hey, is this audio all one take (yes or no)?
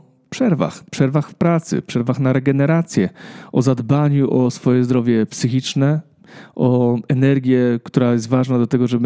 yes